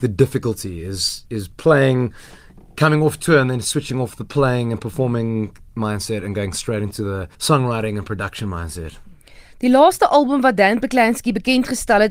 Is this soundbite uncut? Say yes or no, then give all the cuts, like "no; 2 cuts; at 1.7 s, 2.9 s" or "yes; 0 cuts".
no; 1 cut; at 7.3 s